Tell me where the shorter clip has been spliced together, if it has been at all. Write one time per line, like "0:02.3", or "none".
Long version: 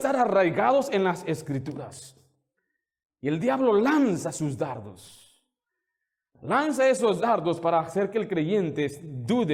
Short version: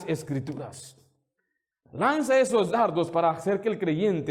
0:01.7